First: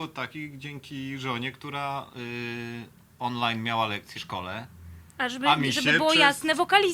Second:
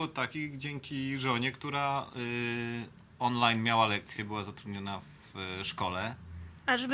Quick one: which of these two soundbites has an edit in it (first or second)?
first